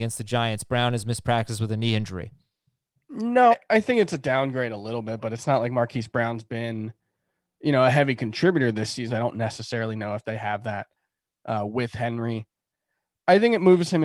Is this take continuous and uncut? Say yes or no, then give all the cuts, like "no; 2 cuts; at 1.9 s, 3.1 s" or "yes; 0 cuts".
no; 2 cuts; at 3.5 s, 9.1 s